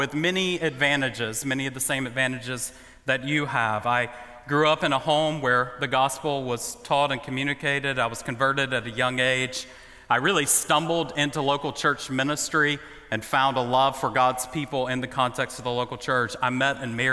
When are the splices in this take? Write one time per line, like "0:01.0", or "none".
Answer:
none

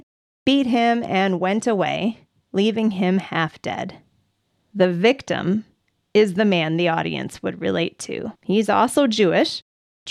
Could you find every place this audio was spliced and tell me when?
0:08.4

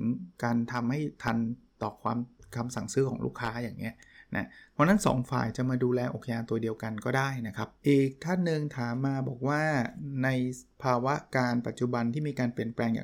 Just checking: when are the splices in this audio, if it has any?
0:07.8

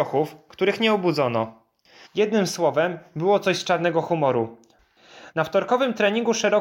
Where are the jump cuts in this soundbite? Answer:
0:02.1
0:05.3

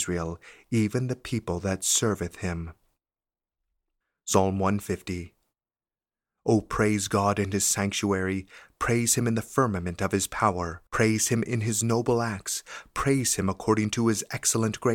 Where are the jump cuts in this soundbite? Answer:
0:10.9

